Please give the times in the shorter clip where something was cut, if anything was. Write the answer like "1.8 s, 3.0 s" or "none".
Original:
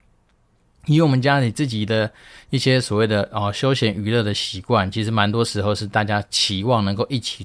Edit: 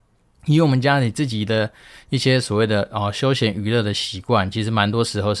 none